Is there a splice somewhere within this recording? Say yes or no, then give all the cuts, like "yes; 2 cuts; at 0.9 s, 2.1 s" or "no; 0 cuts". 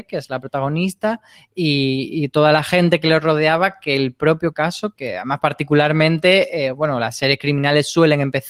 yes; 1 cut; at 5.0 s